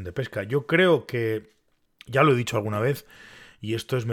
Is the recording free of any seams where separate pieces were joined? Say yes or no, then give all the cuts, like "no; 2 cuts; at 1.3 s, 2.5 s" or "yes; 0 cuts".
yes; 0 cuts